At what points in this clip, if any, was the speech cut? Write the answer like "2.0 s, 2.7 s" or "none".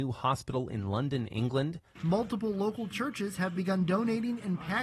2.0 s

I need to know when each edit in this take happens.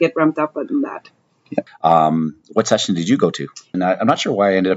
1.7 s, 3.7 s

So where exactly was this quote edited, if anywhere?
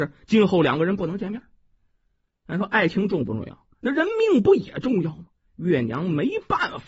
3.7 s

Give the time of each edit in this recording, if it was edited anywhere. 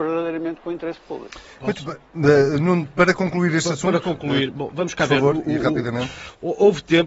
none

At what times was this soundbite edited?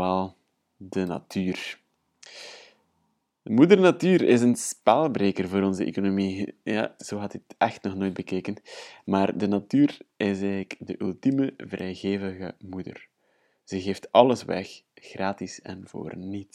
7.0 s

